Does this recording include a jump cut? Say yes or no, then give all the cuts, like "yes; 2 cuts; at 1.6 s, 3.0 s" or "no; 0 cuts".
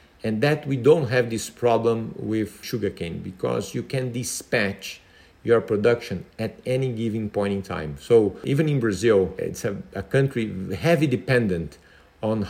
no; 0 cuts